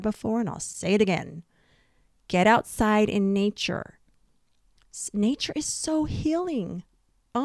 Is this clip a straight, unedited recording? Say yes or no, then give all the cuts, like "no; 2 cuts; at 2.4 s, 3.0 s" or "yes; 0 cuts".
yes; 0 cuts